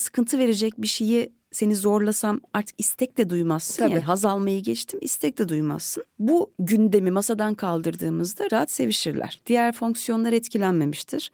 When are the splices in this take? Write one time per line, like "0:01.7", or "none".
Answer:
0:08.5